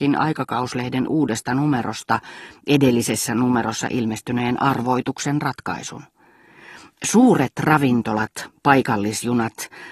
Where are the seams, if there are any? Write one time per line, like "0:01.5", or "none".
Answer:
none